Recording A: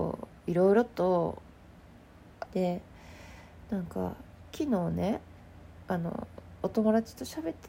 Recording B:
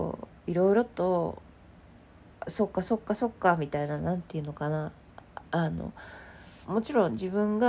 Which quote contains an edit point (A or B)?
A